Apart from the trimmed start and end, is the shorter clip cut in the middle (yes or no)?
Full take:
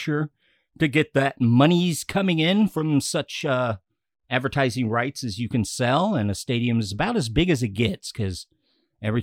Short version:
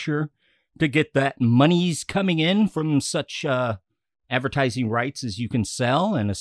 no